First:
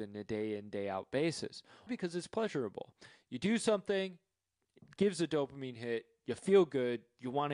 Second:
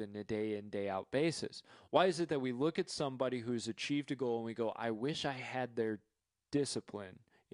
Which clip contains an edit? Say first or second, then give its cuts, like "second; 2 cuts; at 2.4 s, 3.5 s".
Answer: first; 1 cut; at 1.9 s